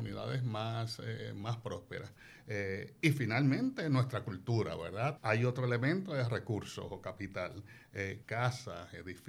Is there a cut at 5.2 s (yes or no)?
yes